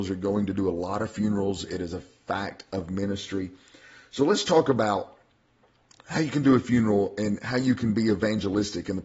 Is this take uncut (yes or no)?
yes